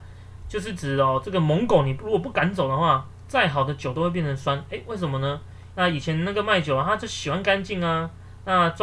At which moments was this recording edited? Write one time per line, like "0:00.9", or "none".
0:05.7